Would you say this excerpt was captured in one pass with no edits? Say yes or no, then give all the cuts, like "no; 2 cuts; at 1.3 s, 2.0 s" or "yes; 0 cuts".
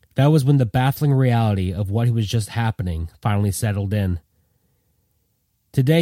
yes; 0 cuts